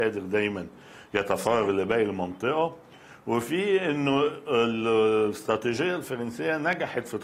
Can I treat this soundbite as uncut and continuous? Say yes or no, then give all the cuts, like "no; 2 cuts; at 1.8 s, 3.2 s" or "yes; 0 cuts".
yes; 0 cuts